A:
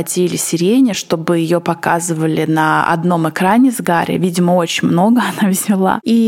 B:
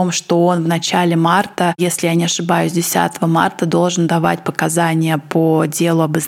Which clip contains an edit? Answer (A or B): A